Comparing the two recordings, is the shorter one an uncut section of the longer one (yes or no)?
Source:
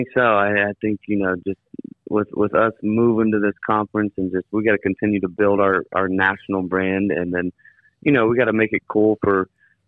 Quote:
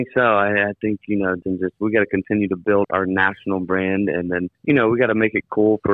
no